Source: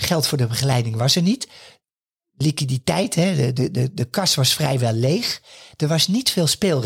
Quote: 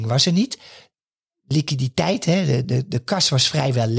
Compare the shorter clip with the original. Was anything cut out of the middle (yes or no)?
yes